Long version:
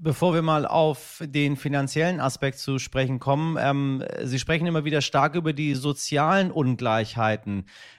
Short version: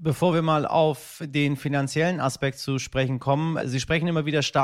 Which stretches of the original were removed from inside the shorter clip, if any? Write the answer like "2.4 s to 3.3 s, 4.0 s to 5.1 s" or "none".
3.6 s to 4.2 s